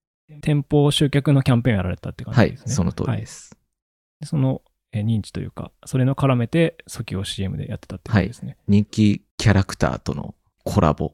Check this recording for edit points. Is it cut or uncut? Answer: uncut